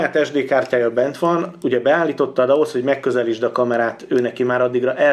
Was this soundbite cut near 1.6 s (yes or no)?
no